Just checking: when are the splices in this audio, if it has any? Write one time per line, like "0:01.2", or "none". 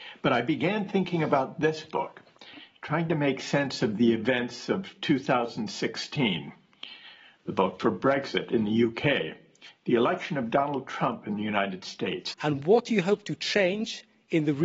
0:12.3